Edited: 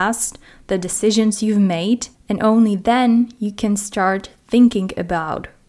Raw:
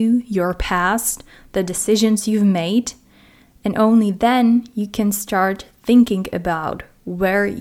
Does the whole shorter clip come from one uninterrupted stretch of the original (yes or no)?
no